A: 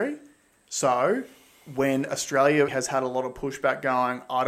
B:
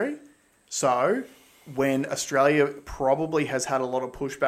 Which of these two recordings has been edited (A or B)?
A